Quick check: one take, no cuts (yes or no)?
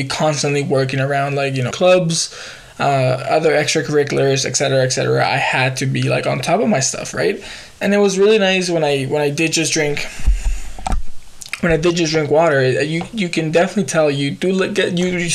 no